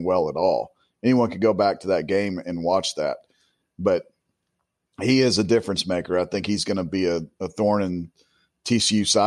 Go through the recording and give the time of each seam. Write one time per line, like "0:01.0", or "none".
none